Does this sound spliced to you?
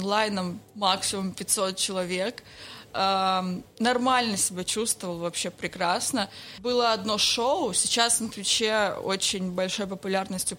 no; 0 cuts

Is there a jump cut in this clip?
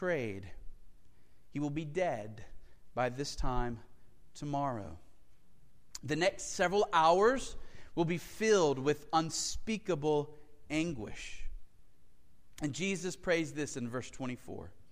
no; 0 cuts

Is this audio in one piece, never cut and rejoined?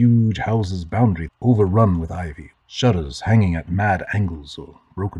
no; 2 cuts; at 1.3 s, 2.5 s

